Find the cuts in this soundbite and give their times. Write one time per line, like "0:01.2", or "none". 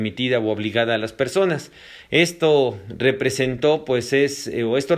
none